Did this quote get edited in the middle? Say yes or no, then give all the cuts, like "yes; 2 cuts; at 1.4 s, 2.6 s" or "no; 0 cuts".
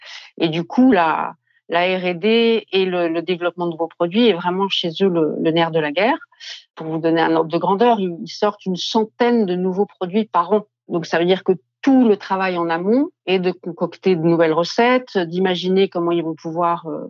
no; 0 cuts